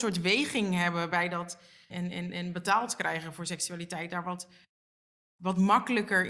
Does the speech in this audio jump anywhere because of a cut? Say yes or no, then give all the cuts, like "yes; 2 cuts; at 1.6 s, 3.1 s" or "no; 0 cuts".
yes; 1 cut; at 1.9 s